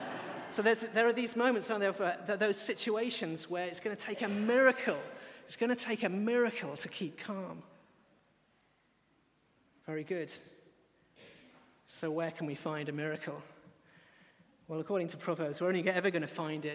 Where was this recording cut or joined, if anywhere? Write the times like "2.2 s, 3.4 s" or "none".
none